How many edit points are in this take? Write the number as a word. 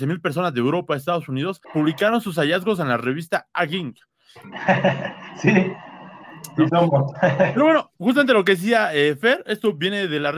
two